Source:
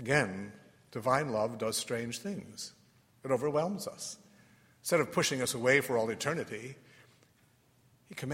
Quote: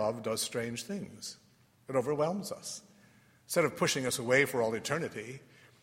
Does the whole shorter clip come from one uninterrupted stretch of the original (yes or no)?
yes